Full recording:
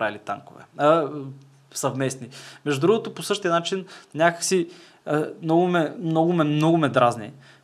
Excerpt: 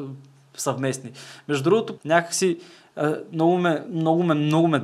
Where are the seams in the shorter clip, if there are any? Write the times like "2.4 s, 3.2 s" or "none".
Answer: 2.0 s